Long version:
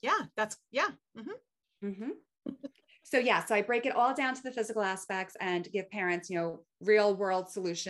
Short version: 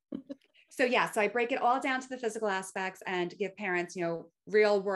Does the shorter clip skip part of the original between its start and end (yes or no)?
no